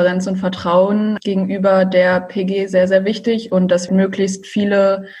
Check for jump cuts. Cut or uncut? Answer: cut